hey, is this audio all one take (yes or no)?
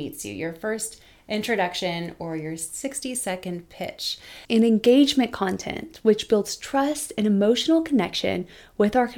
no